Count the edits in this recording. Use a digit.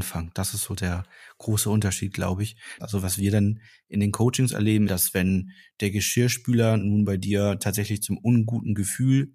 2